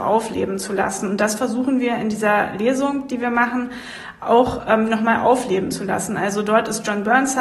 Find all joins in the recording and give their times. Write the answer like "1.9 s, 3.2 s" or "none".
none